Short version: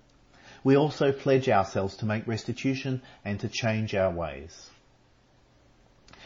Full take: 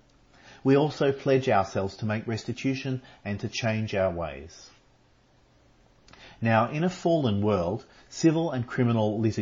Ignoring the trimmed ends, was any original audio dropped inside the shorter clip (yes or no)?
no